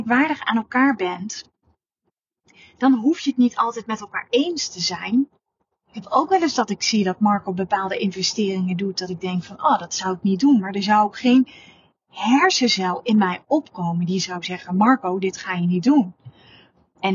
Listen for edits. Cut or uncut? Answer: uncut